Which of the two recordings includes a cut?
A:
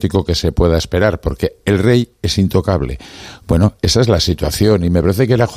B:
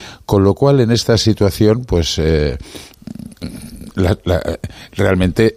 A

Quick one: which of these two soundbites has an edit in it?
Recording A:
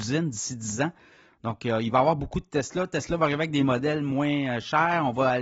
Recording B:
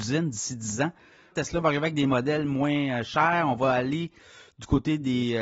B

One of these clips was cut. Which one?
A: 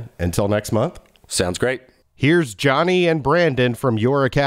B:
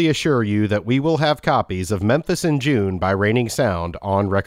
A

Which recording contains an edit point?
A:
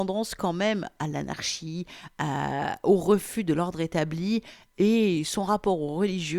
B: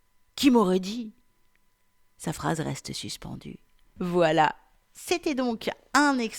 B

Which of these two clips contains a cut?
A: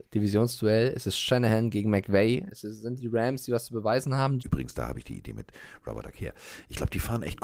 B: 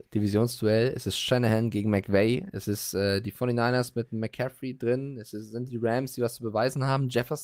A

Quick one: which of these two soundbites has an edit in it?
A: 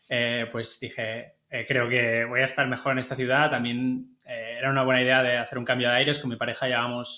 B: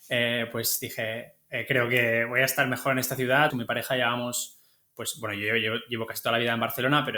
B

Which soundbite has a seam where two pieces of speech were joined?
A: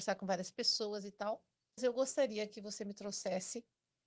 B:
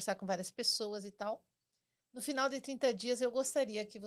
A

